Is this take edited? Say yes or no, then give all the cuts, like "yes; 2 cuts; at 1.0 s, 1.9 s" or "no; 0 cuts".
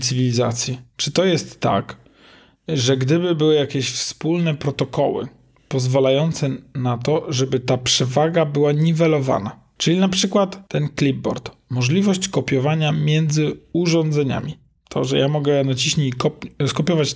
no; 0 cuts